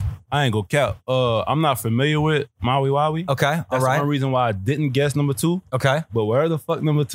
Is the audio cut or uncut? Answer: uncut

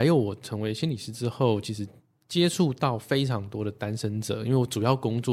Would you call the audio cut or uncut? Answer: uncut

